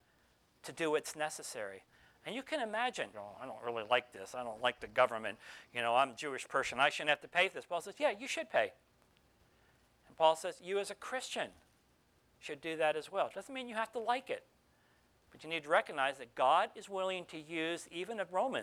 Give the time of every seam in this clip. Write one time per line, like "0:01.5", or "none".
0:03.1